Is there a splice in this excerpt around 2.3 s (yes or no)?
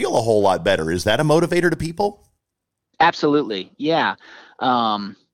no